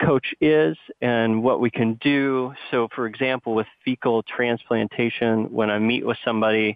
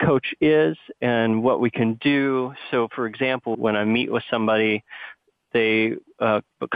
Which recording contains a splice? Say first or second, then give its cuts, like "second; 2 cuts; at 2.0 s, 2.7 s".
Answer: second; 1 cut; at 3.5 s